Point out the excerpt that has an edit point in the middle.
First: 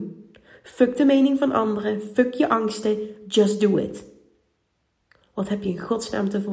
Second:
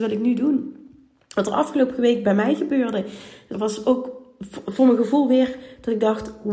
second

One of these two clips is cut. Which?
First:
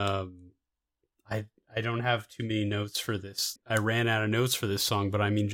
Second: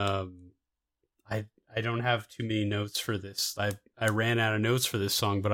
first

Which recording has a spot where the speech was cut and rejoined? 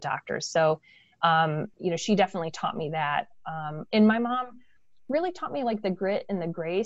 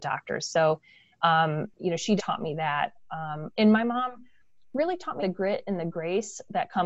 second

